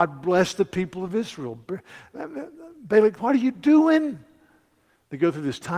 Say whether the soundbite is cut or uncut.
cut